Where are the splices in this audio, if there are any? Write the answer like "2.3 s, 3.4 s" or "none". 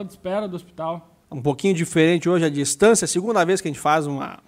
1.2 s